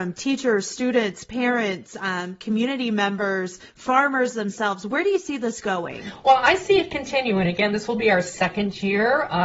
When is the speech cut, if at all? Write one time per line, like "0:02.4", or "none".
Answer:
none